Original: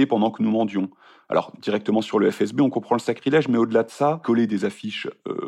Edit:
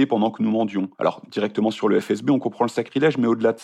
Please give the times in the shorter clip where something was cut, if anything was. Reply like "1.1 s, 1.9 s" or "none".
0.9 s